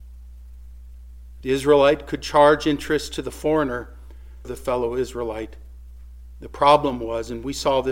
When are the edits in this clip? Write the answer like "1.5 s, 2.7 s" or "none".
1.4 s, 4.4 s